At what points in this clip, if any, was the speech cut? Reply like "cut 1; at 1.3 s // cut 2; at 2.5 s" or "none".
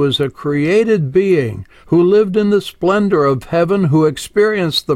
none

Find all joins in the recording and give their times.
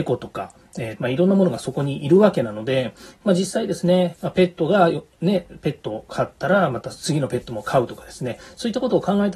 cut 1; at 1.0 s // cut 2; at 4.1 s

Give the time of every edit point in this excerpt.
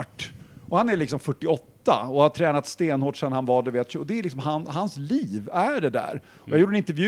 none

